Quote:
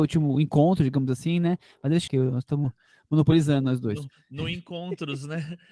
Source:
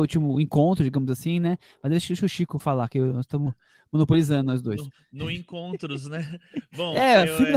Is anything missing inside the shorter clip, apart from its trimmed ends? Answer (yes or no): yes